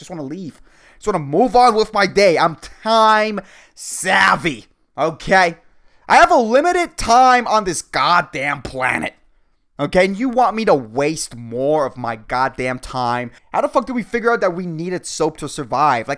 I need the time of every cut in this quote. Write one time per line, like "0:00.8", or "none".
0:13.4

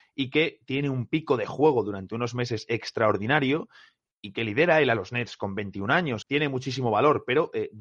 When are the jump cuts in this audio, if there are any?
0:06.2

